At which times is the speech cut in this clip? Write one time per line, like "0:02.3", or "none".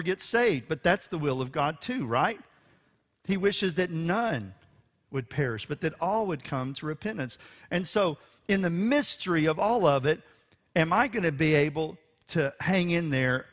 none